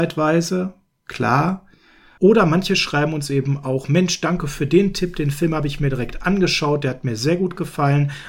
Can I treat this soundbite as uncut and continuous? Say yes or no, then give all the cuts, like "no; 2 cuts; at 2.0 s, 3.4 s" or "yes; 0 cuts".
no; 1 cut; at 2.2 s